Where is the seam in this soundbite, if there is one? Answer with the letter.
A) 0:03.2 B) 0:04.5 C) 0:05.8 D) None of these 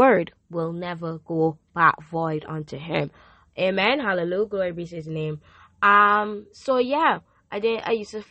D